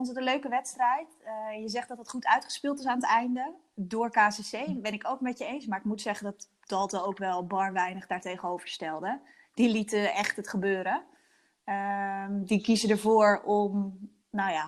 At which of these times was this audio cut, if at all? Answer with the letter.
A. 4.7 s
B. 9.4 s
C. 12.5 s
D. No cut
D